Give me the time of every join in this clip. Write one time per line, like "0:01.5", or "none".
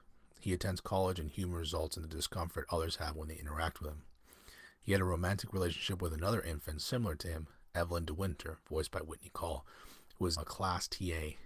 0:10.4